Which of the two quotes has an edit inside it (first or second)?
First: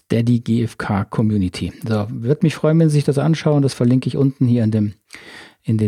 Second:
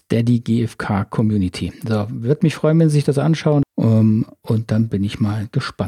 second